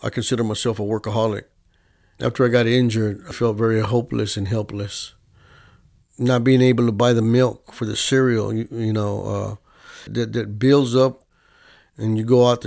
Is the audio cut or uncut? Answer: cut